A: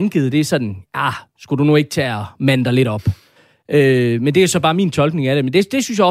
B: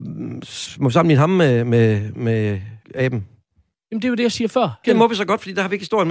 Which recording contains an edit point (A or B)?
B